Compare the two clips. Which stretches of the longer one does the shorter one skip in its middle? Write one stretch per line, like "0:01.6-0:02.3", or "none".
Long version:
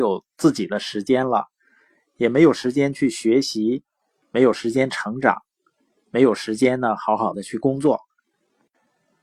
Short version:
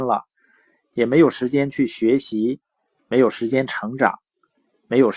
none